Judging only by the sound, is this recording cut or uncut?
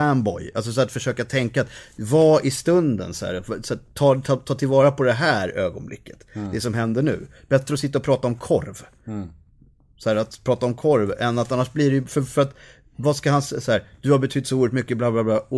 uncut